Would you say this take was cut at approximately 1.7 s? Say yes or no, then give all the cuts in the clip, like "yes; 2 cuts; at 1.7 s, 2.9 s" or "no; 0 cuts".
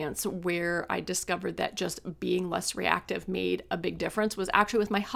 no; 0 cuts